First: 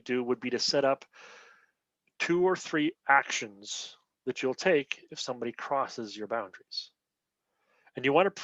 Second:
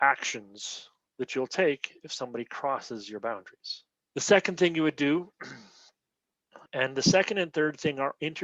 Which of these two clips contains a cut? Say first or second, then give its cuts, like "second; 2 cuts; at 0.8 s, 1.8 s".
second; 2 cuts; at 4.1 s, 6.7 s